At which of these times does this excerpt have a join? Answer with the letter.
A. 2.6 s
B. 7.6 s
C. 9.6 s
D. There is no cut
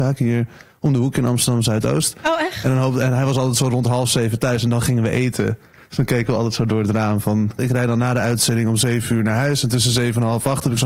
B